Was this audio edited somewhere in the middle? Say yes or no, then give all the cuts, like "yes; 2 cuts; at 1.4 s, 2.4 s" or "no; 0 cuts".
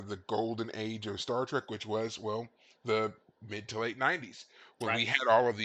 no; 0 cuts